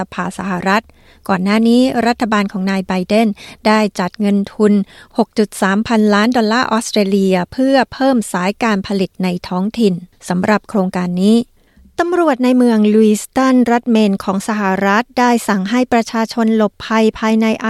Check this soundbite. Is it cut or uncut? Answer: uncut